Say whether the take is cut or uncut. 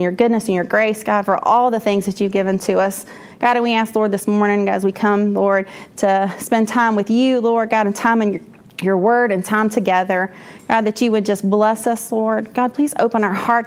uncut